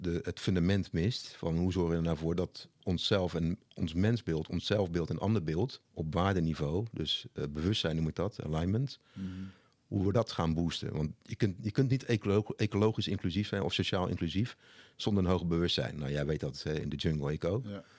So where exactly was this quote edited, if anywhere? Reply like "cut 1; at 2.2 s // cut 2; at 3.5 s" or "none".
cut 1; at 5.8 s